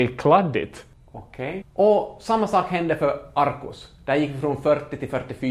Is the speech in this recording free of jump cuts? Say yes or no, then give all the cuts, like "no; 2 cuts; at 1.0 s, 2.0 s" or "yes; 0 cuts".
no; 1 cut; at 1.6 s